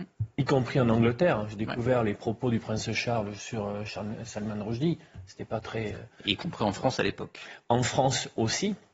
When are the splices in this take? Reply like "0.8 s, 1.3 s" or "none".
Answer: none